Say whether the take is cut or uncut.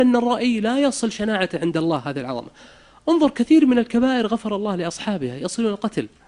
uncut